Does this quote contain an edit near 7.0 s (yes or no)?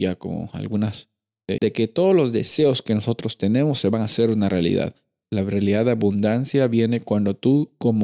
no